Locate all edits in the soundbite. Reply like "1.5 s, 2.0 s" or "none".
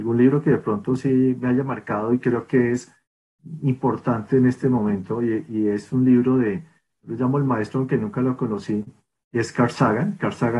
none